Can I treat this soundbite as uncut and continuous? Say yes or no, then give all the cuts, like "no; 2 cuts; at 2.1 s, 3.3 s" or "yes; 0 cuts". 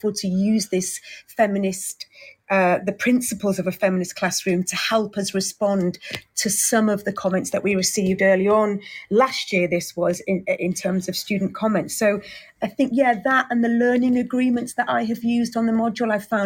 yes; 0 cuts